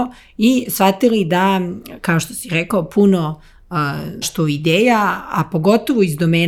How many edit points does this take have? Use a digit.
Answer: 1